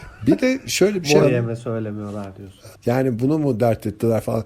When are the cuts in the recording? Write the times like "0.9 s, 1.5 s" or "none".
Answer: 1.2 s, 2.7 s